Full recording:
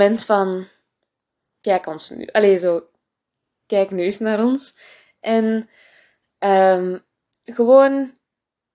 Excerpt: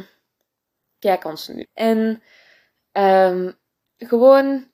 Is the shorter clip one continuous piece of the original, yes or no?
no